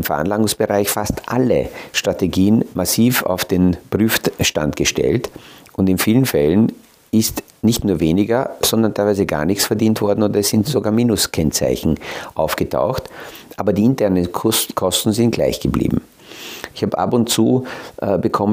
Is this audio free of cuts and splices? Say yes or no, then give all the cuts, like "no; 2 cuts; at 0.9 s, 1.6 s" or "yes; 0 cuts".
yes; 0 cuts